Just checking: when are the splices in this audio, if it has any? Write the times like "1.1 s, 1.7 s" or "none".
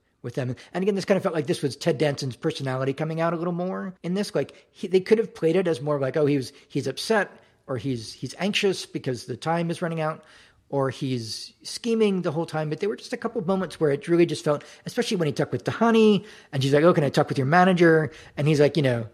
4.0 s